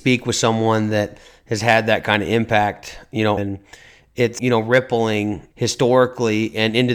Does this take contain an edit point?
yes; 3 cuts; at 3.4 s, 4.4 s, 5.5 s

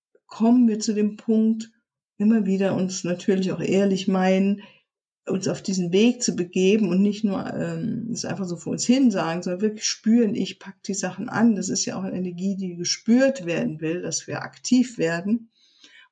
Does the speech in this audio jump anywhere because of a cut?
no; 0 cuts

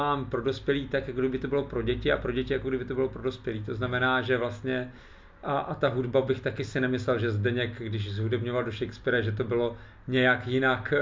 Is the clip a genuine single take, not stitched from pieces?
yes; 0 cuts

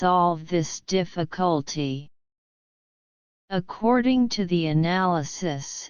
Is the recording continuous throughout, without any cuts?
yes; 0 cuts

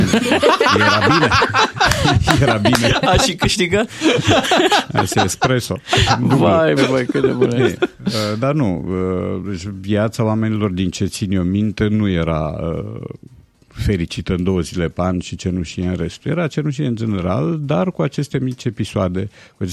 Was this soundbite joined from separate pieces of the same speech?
yes; 1 cut; at 6.8 s

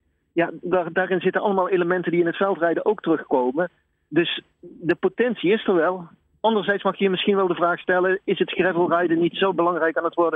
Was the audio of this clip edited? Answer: no; 0 cuts

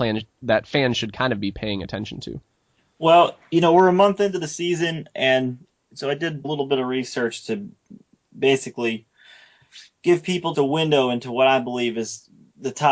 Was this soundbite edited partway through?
yes; 2 cuts; at 6.4 s, 10.5 s

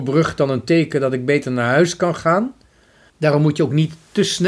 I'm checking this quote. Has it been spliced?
yes; 1 cut; at 3.1 s

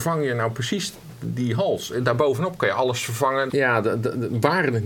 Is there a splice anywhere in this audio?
yes; 1 cut; at 3.5 s

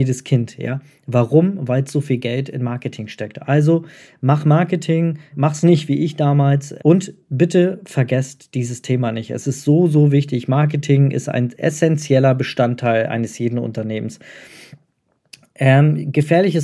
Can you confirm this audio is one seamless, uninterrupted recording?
no; 2 cuts; at 5.3 s, 6.8 s

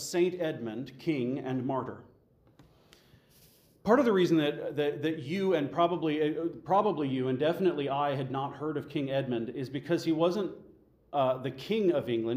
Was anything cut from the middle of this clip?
no; 0 cuts

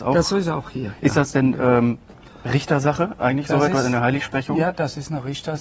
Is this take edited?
no; 0 cuts

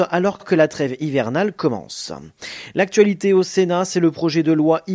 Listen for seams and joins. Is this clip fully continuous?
yes; 0 cuts

